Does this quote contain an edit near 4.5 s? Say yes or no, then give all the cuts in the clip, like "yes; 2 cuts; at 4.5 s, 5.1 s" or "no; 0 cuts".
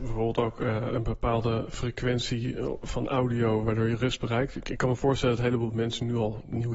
no; 0 cuts